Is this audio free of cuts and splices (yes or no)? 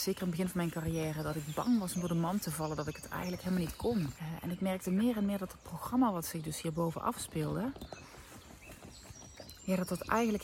no